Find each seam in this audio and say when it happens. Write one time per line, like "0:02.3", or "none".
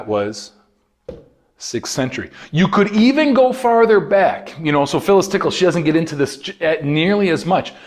none